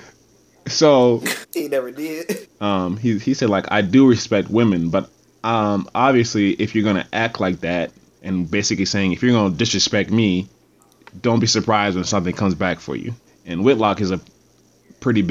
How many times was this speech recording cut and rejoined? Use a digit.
3